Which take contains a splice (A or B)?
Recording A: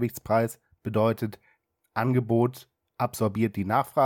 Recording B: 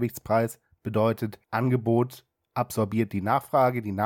B